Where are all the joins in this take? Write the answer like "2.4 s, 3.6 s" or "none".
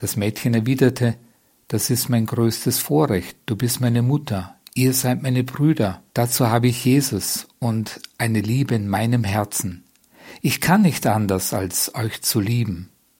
6.1 s